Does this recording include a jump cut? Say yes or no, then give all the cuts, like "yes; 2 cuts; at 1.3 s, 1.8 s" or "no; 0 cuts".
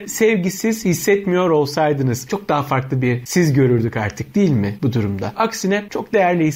yes; 2 cuts; at 2.3 s, 5.3 s